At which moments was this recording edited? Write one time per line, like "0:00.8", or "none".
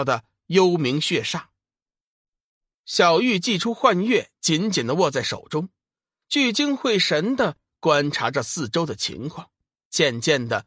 0:02.7

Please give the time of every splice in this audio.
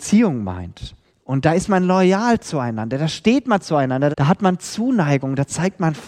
0:04.1

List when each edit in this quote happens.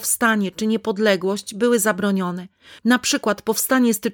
0:02.8

